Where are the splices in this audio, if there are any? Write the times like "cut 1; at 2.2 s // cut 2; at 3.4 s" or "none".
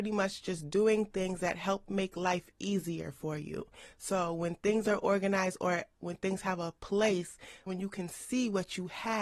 cut 1; at 7.7 s